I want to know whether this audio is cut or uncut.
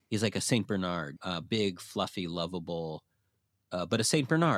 cut